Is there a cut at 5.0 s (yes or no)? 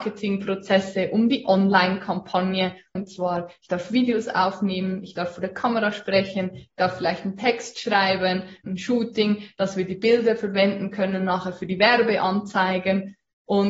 no